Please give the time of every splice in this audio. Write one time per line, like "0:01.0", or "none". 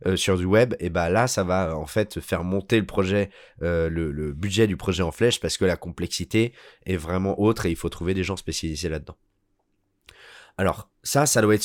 none